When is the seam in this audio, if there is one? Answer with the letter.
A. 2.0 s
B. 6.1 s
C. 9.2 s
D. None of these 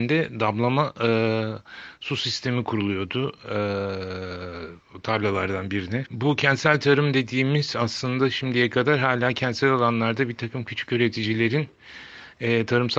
B